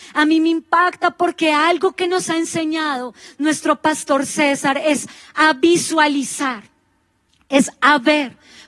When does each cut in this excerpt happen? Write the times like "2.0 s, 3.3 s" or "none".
none